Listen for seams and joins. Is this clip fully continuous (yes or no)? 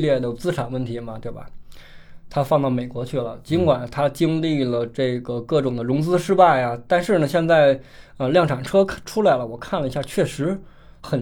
yes